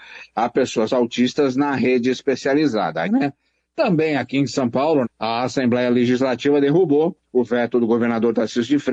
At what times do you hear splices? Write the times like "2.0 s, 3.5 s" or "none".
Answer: 3.0 s, 5.0 s